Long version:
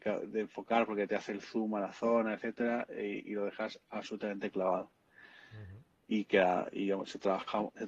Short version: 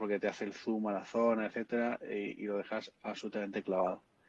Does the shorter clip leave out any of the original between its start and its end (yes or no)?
no